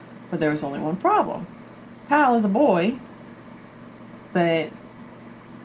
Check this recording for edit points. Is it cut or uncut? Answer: cut